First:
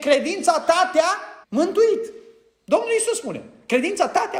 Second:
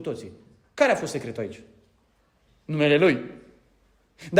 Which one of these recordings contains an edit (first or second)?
first